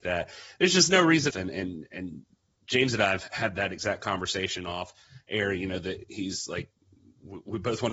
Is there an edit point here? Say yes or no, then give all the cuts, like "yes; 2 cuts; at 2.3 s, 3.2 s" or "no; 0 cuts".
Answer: yes; 1 cut; at 1.3 s